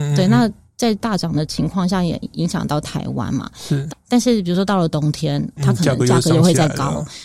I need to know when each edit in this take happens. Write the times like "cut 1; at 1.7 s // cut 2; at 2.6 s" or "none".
cut 1; at 3.9 s // cut 2; at 5.6 s